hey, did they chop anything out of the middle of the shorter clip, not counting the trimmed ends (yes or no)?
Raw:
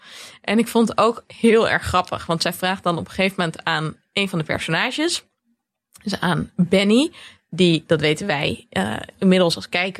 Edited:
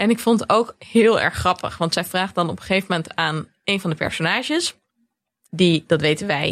yes